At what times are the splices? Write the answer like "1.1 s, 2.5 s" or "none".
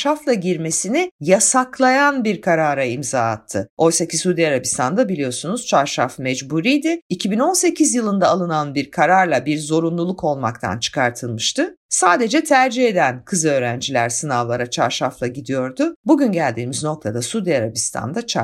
3.7 s